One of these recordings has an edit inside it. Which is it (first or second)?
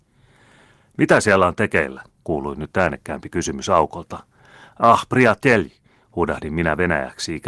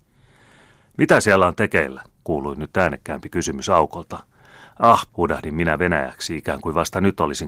second